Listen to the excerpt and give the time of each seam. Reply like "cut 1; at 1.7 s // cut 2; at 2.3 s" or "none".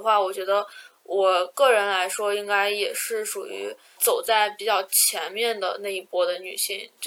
none